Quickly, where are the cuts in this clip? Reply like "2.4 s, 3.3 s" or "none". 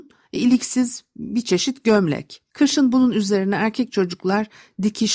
none